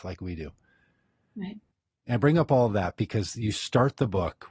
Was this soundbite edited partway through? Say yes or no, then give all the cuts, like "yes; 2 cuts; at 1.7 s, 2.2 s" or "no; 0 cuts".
no; 0 cuts